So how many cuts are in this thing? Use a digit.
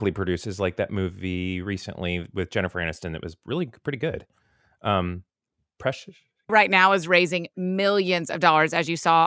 1